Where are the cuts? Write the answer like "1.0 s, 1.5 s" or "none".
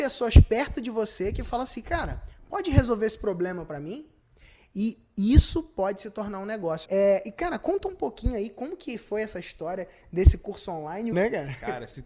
6.9 s, 11.1 s